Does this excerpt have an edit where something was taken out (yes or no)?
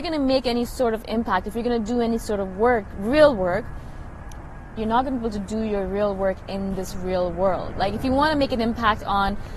yes